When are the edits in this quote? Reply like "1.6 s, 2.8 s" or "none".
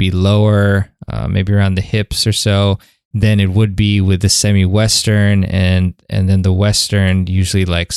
none